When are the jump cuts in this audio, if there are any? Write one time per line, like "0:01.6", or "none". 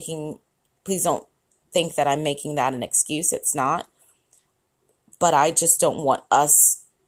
none